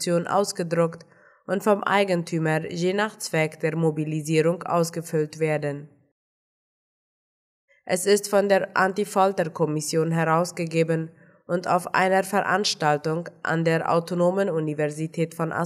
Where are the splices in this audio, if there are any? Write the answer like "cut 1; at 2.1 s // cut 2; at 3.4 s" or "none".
cut 1; at 7.7 s